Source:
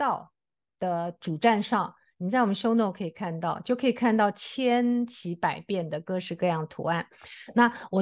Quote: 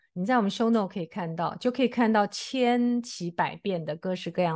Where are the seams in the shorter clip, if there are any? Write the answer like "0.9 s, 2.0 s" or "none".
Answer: none